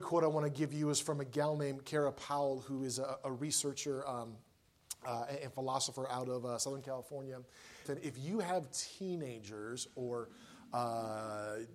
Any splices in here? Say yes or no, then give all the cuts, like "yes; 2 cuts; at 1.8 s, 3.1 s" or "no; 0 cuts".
yes; 1 cut; at 7.8 s